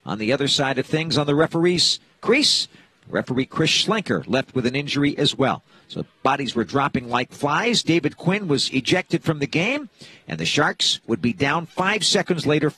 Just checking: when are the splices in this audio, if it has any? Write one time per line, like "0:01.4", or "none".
none